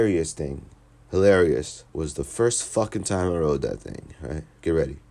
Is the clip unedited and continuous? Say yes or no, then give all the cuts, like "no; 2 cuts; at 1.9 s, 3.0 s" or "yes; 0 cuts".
no; 1 cut; at 1.9 s